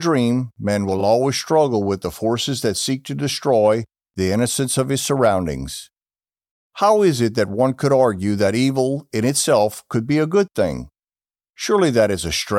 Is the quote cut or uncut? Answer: uncut